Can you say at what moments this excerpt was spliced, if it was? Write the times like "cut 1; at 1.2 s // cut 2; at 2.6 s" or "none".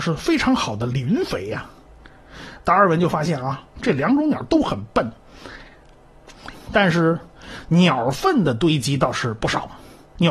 cut 1; at 3.8 s // cut 2; at 6.5 s